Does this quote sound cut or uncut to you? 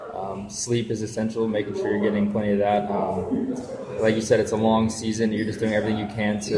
uncut